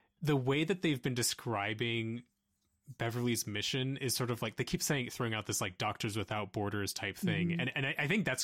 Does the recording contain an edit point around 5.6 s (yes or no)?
no